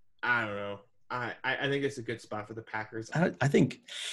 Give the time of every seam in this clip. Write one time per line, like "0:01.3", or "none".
0:03.1